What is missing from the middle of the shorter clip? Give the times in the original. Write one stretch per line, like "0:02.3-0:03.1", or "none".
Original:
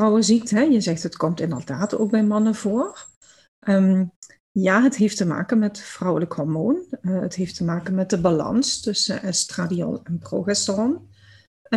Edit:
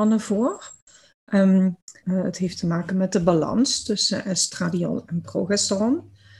0:04.4-0:07.0